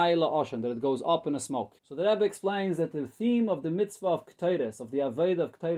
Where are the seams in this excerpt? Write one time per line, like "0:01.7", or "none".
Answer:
0:01.8